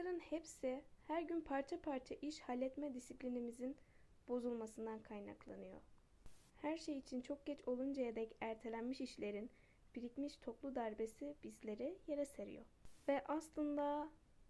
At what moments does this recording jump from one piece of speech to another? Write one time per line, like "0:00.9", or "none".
none